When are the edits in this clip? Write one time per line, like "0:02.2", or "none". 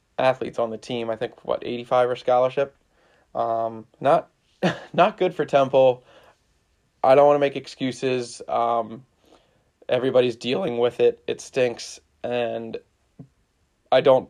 0:04.0